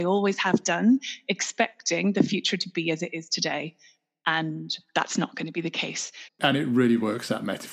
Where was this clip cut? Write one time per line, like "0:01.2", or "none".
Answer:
0:06.3